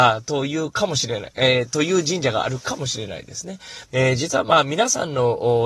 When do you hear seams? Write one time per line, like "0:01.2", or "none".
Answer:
0:03.9